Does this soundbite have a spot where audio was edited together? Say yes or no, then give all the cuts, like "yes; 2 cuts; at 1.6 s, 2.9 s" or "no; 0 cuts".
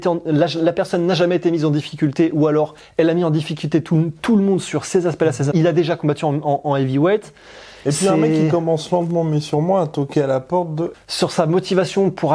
yes; 2 cuts; at 5.5 s, 10.9 s